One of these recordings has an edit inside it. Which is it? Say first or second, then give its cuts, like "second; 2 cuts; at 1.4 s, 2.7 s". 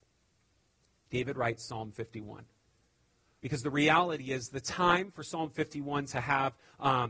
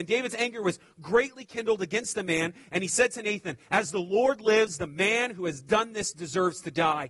first; 1 cut; at 3.4 s